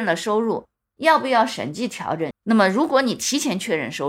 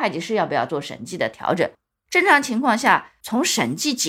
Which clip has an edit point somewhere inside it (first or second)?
first